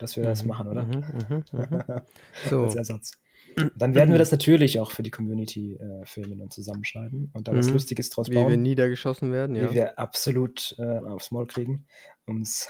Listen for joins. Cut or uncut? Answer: cut